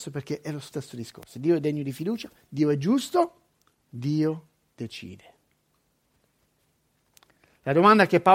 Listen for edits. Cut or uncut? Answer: cut